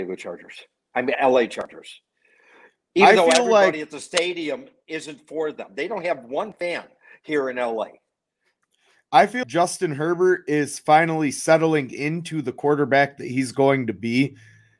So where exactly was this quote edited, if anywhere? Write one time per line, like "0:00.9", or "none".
0:01.1
0:09.4